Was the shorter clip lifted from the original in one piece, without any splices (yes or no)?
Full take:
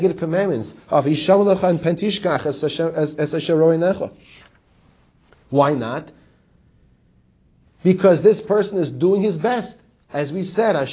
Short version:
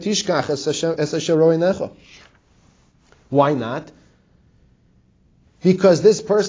no